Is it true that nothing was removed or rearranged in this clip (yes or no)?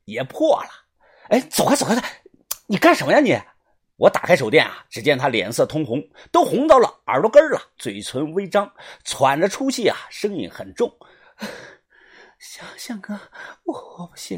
no